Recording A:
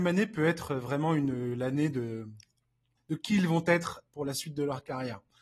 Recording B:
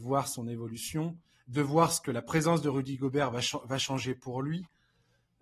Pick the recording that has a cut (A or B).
A